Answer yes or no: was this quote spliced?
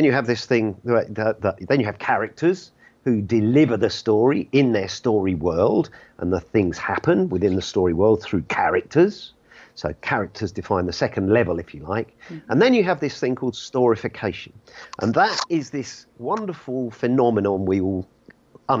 no